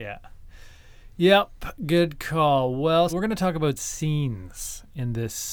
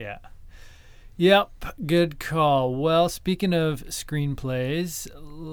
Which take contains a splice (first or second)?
first